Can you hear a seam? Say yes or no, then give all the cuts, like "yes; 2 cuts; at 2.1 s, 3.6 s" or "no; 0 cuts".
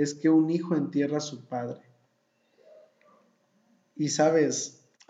no; 0 cuts